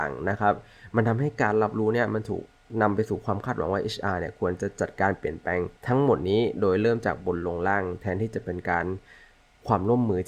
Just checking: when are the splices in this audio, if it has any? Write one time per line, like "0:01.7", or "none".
0:05.8